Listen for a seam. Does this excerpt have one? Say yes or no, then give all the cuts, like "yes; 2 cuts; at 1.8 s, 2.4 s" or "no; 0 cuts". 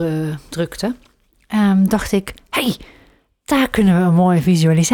no; 0 cuts